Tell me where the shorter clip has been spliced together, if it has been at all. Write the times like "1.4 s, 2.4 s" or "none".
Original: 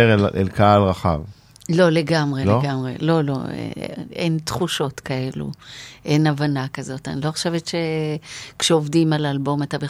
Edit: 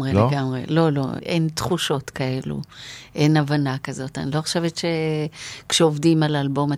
1.2 s